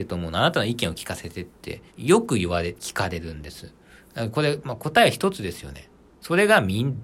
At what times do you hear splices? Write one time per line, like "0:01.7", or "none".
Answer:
0:01.9
0:06.1